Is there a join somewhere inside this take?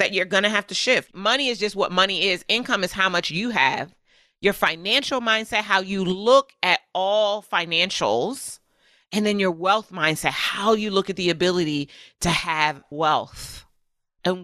yes; 1 cut; at 1.1 s

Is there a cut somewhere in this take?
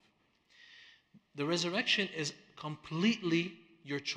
no; 0 cuts

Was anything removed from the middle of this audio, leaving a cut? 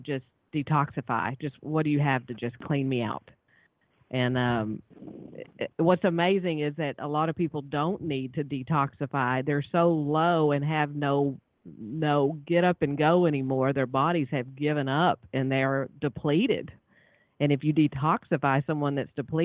yes; 1 cut; at 5.7 s

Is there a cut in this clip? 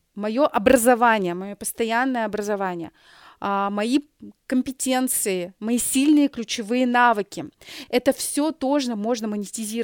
no; 0 cuts

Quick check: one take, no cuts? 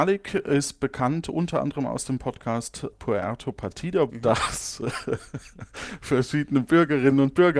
no; 2 cuts; at 2.9 s, 4.1 s

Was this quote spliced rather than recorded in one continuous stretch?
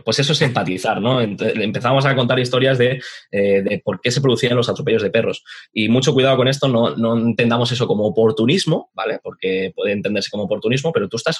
no; 0 cuts

